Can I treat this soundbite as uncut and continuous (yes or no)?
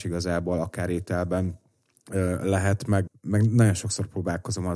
no